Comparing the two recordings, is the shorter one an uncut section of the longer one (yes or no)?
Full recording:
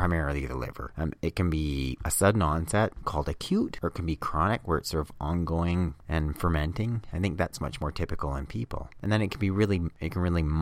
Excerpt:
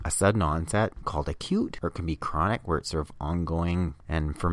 yes